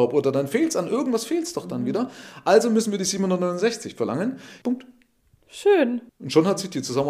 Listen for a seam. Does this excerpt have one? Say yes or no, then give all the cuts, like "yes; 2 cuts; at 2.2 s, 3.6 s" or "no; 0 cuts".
yes; 2 cuts; at 4.6 s, 6.1 s